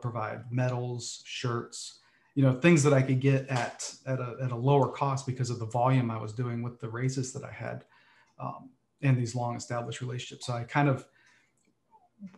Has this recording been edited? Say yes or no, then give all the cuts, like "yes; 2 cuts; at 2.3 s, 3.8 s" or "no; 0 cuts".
no; 0 cuts